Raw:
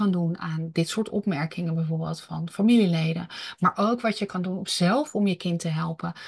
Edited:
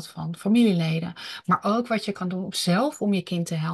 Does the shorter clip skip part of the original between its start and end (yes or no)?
no